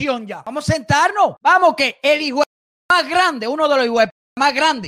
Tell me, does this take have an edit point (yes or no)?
no